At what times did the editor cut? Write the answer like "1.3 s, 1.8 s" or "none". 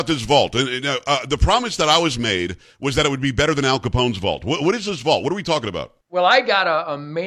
6.0 s